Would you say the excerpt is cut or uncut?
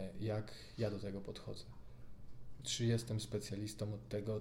cut